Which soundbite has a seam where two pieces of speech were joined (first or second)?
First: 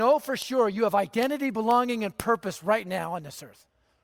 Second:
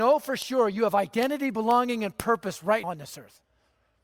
second